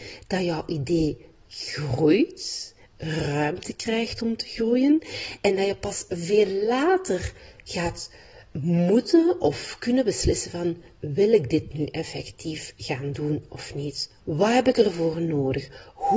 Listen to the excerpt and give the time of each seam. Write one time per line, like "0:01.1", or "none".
0:14.2